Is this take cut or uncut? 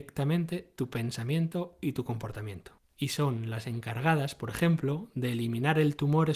uncut